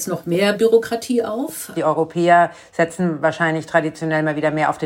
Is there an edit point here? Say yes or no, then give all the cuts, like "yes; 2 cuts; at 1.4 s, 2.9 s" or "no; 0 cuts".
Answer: yes; 1 cut; at 1.7 s